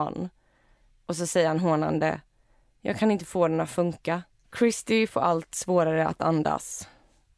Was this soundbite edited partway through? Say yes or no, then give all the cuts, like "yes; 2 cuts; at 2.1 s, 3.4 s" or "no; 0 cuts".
yes; 1 cut; at 4.4 s